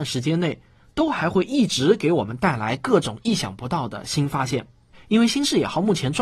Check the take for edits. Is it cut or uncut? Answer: cut